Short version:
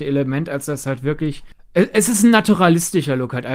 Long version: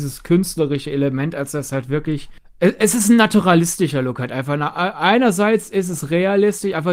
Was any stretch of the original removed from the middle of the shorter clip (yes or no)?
no